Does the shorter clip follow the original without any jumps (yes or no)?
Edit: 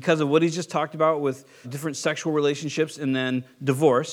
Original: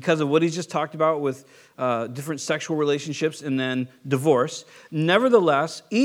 no